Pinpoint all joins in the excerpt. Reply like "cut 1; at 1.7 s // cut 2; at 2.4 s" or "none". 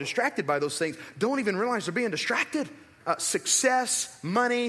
cut 1; at 3.0 s